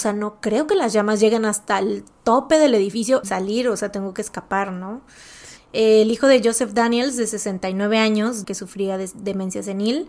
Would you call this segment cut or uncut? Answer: cut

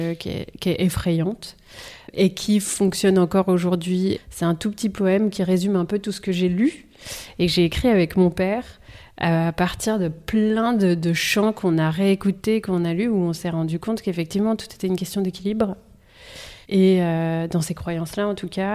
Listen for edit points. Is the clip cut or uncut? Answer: cut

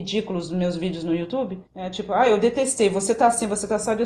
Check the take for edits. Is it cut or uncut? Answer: cut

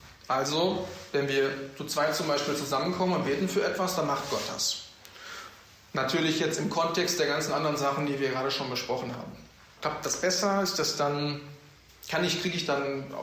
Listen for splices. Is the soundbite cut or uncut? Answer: cut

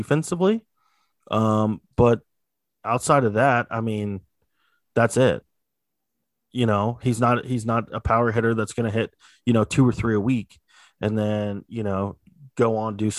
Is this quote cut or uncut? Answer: uncut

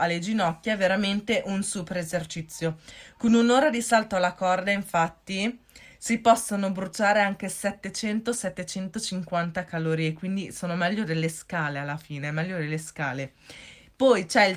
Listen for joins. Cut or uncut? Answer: cut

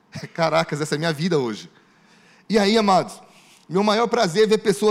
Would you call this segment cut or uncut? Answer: uncut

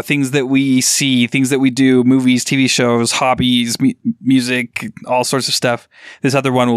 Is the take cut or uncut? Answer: uncut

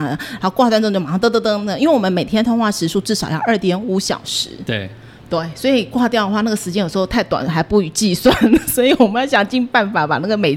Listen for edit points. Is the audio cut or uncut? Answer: uncut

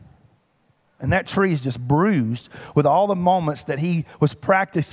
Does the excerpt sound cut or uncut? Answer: cut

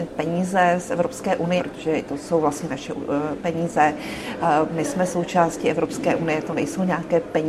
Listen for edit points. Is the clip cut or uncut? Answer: cut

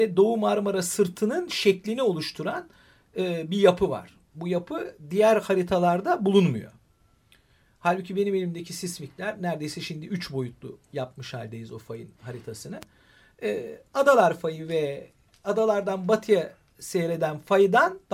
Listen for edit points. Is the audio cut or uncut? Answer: uncut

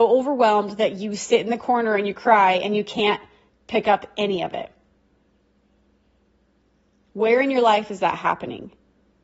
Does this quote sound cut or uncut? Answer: uncut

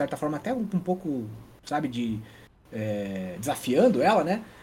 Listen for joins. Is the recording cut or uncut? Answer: uncut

